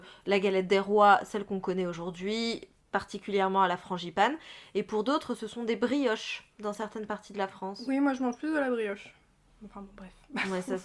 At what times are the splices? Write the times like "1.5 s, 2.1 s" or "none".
none